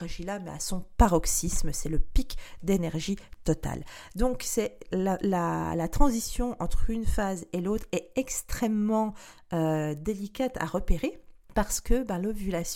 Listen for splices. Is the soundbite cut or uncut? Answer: uncut